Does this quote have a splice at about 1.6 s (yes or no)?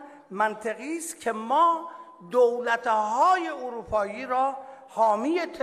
no